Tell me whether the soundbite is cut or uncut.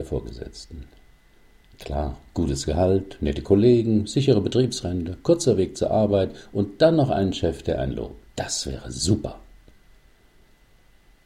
uncut